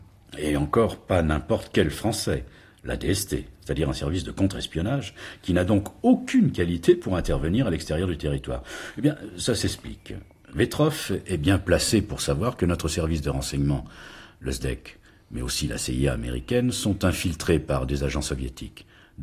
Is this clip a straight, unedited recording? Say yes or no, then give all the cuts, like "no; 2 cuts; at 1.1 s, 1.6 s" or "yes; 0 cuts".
yes; 0 cuts